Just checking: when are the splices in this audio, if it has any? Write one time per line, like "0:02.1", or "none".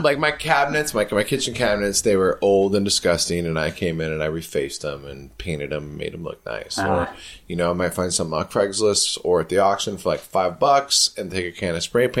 none